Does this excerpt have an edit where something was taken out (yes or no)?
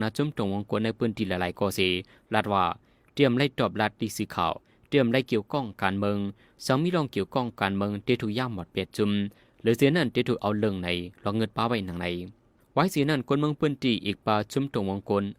no